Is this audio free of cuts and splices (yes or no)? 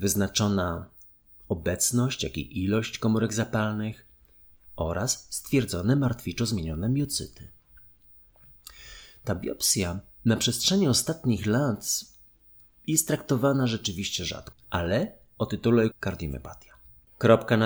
no